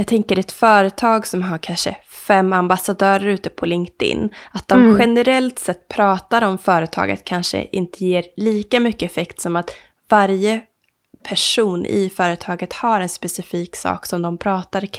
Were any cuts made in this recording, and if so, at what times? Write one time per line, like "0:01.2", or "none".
none